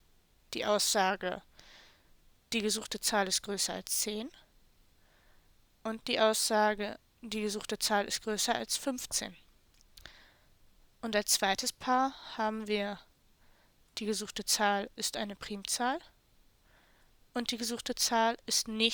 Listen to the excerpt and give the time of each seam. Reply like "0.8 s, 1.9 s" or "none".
none